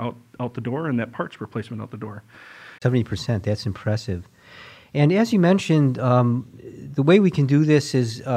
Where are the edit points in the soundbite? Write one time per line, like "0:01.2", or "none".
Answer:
0:02.8